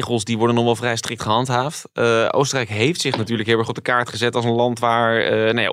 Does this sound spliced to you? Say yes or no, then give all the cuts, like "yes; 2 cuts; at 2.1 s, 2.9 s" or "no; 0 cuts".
no; 0 cuts